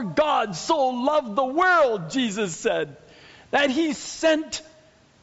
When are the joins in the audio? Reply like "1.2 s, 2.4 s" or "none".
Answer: none